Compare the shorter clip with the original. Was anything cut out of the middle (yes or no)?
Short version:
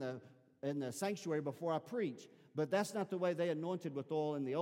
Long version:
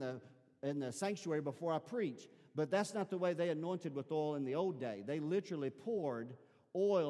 no